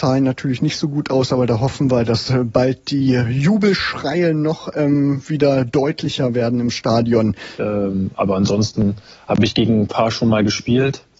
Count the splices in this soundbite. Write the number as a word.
one